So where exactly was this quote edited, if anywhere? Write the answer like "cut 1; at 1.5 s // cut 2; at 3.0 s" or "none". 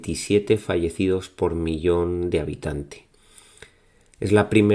none